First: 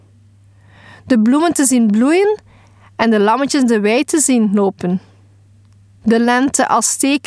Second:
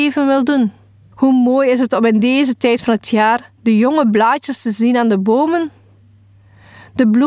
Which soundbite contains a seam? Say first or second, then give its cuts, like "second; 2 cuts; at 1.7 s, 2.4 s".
second; 2 cuts; at 1.1 s, 3.6 s